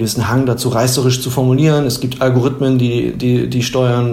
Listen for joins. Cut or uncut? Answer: uncut